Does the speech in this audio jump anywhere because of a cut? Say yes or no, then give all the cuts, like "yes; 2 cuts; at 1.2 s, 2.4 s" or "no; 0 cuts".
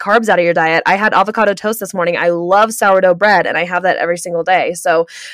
no; 0 cuts